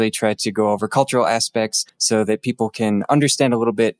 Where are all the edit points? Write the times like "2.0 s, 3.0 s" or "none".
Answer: 1.9 s